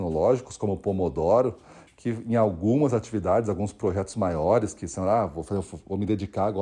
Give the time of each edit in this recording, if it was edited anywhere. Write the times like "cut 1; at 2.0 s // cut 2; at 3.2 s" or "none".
none